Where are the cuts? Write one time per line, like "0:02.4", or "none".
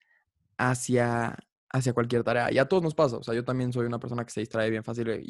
none